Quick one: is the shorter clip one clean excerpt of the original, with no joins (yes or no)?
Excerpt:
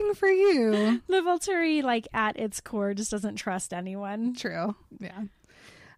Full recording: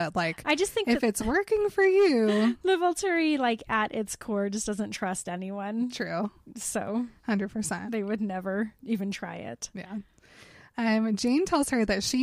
no